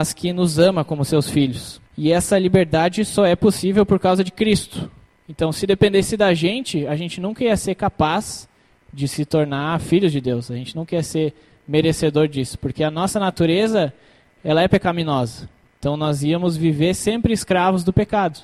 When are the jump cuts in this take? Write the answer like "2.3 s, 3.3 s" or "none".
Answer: 1.9 s